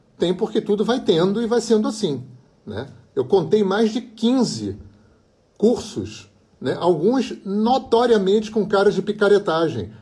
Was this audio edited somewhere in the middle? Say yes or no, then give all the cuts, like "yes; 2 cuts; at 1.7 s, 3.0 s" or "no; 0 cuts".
no; 0 cuts